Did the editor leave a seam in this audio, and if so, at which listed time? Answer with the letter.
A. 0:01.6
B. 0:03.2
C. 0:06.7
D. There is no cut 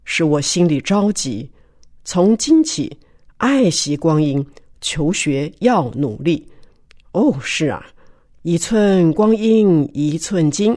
C